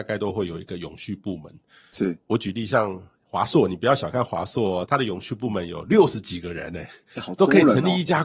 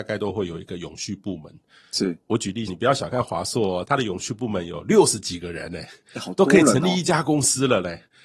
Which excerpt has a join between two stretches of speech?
second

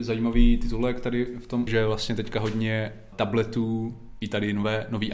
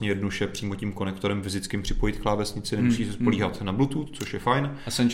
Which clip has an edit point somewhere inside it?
first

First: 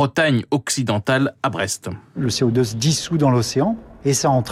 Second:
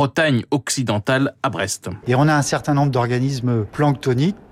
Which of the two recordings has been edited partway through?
second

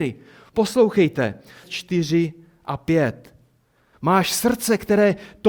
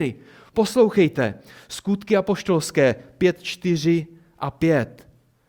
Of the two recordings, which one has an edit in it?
first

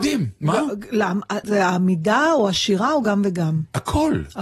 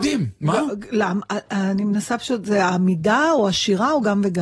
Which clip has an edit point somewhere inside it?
first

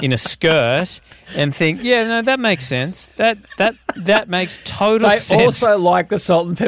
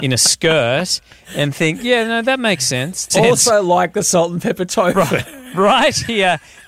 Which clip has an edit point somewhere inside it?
second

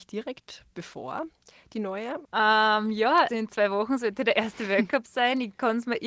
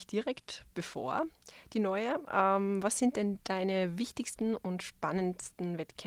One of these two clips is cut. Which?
first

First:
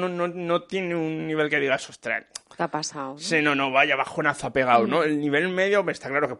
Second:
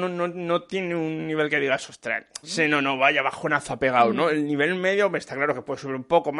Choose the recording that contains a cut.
second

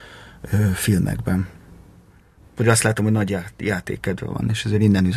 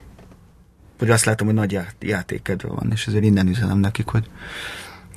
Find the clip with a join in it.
first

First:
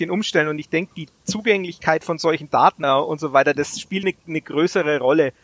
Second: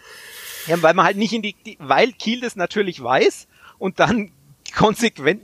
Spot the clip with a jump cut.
first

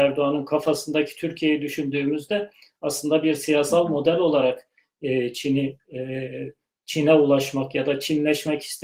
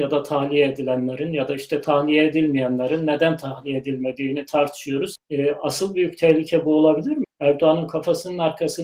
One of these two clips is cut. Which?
second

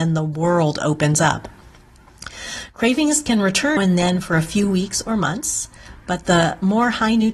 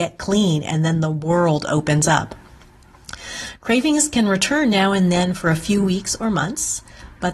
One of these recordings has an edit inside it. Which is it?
first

